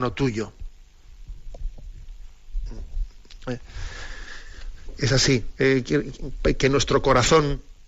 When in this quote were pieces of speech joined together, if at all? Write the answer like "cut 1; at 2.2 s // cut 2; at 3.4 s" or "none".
cut 1; at 3.4 s